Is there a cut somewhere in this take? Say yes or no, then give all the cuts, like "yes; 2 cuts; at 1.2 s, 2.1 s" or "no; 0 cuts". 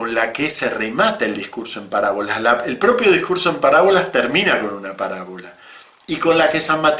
no; 0 cuts